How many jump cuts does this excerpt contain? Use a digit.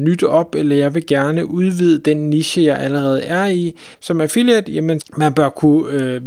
2